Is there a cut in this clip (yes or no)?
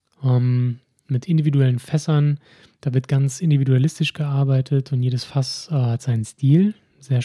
no